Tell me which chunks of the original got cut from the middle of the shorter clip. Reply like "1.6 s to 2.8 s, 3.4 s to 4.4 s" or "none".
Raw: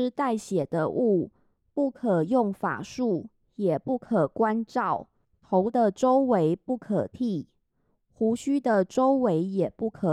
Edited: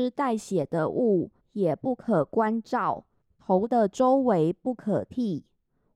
1.4 s to 3.4 s